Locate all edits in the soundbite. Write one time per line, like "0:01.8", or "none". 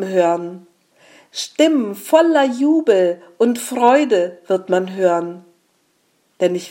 none